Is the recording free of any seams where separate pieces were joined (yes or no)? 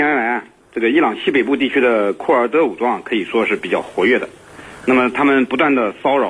yes